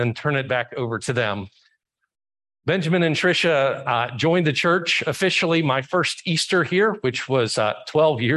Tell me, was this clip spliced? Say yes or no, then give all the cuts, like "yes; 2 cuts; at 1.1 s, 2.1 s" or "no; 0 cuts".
no; 0 cuts